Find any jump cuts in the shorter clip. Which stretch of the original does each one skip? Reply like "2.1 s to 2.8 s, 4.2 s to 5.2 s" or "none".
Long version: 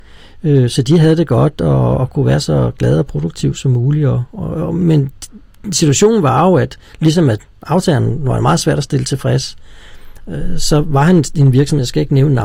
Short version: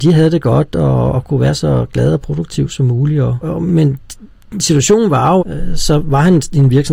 4.3 s to 4.5 s, 6.5 s to 10.2 s